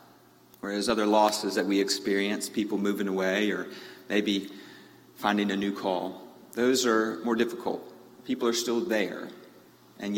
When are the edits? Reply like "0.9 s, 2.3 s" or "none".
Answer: 6.5 s